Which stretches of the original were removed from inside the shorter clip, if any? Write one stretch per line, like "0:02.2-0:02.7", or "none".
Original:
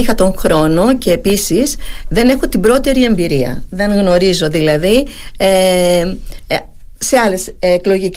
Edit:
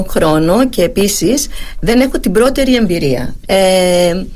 0:03.7-0:05.3